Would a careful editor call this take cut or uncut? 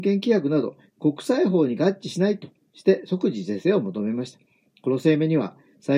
uncut